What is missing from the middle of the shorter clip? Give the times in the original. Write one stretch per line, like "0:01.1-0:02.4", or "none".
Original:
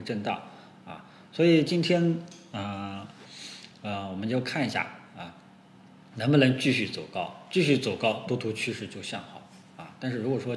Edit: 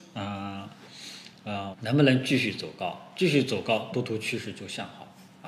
0:04.1-0:06.1